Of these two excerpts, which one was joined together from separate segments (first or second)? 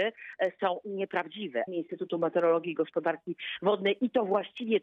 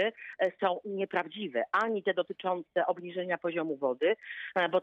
first